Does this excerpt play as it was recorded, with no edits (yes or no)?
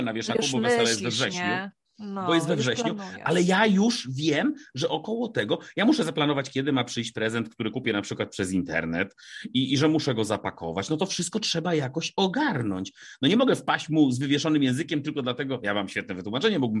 yes